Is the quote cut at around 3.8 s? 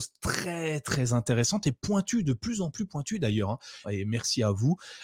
yes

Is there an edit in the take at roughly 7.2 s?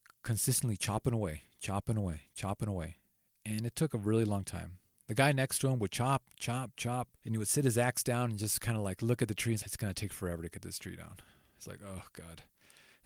yes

